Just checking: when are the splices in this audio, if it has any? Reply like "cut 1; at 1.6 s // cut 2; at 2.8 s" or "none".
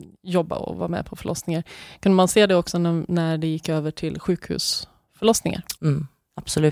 cut 1; at 5.7 s